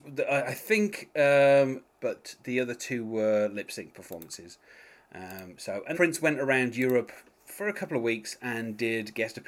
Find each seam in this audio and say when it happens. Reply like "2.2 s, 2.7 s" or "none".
1.9 s, 5.9 s